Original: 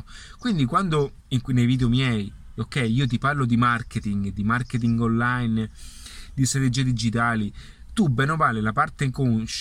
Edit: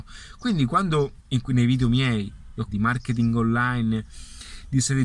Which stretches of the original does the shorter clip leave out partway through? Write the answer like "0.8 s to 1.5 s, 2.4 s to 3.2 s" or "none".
2.7 s to 4.3 s